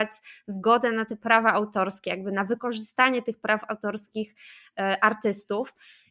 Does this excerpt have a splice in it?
no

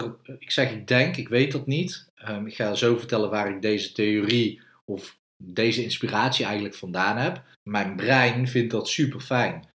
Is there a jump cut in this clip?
yes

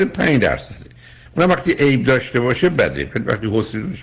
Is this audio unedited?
yes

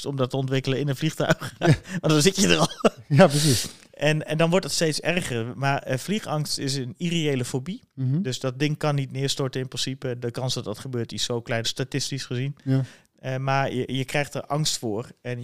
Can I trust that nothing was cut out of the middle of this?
no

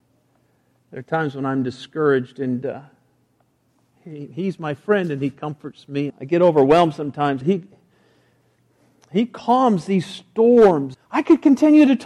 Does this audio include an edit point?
yes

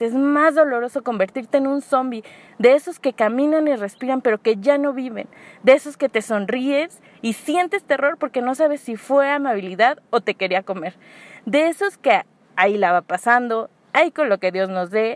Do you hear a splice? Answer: no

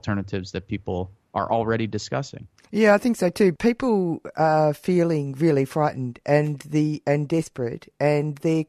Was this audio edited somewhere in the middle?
no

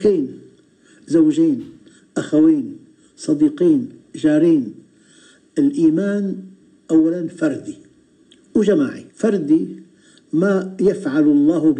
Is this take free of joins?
no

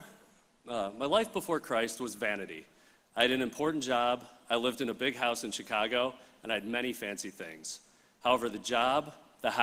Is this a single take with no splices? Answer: yes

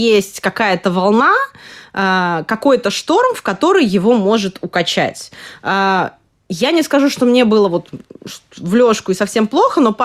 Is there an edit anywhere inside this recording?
no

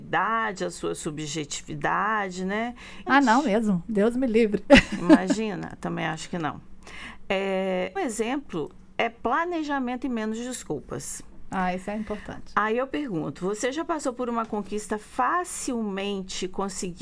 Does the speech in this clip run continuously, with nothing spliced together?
no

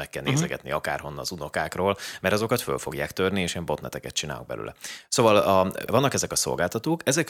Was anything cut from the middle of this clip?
yes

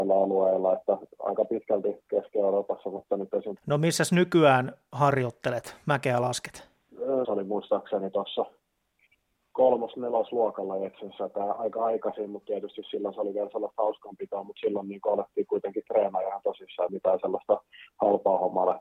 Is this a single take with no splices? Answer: no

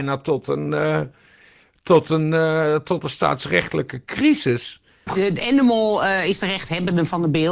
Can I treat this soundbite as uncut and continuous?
no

